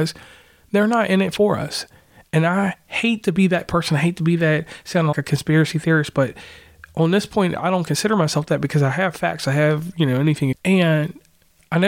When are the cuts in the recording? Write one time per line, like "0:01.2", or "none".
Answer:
0:05.1
0:10.5